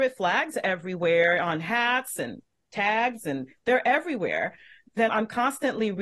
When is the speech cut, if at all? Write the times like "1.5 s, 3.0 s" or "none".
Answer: 5.1 s